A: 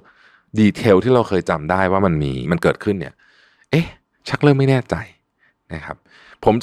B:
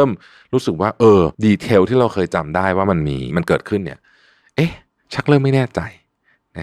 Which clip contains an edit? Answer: B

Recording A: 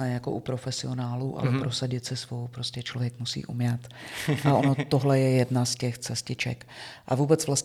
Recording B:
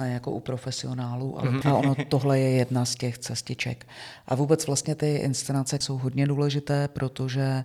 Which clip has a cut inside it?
B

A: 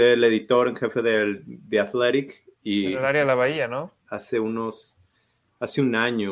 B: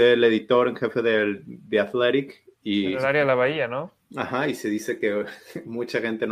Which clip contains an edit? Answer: A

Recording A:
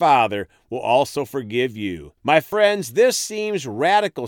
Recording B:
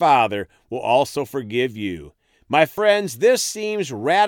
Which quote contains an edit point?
A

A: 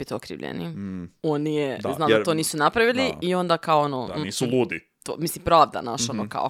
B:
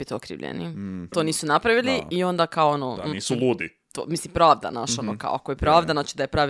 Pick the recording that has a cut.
B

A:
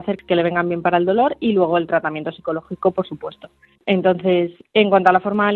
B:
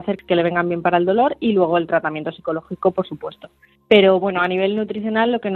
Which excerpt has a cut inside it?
A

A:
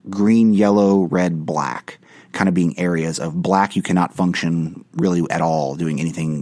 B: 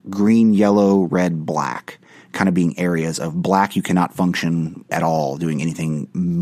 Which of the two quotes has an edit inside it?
B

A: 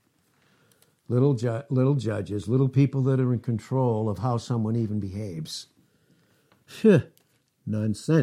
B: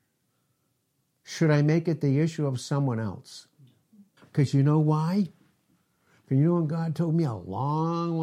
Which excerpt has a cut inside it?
B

